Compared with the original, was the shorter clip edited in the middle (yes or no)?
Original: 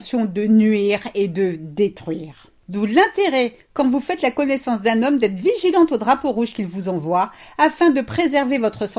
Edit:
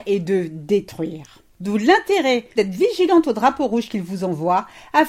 yes